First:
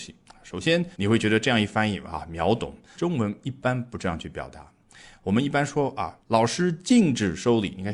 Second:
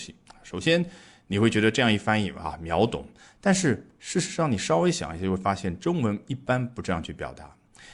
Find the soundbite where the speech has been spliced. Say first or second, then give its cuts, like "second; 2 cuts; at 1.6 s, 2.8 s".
first; 3 cuts; at 0.9 s, 2.9 s, 6.2 s